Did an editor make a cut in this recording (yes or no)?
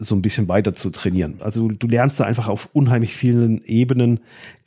yes